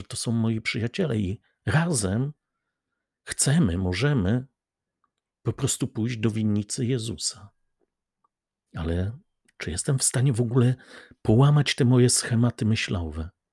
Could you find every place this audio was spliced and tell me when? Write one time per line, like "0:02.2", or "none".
none